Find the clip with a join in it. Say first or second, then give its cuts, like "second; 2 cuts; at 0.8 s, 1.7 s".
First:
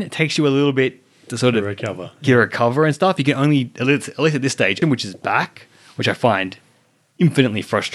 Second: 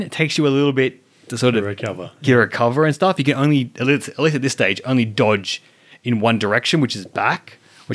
first; 1 cut; at 4.8 s